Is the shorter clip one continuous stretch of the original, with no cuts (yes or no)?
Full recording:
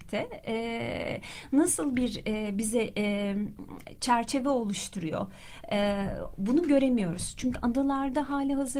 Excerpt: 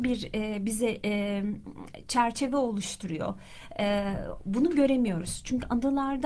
yes